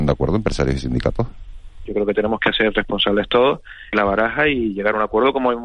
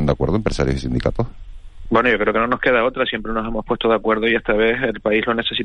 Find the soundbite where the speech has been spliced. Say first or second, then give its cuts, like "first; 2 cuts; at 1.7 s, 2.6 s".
first; 2 cuts; at 1.9 s, 3.9 s